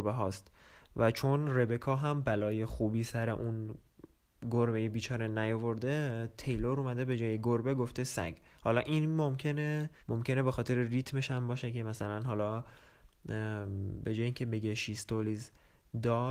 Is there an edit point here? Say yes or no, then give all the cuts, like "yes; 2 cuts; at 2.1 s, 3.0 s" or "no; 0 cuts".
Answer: yes; 1 cut; at 10.0 s